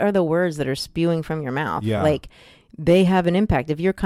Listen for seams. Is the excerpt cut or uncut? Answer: uncut